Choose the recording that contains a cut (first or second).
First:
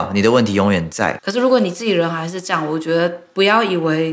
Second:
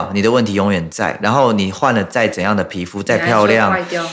first